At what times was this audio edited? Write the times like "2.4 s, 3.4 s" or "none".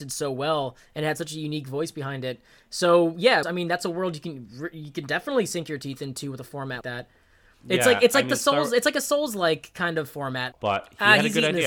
3.4 s, 6.8 s, 10.5 s